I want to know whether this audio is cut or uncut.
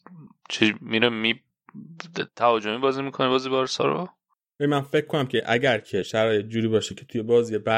uncut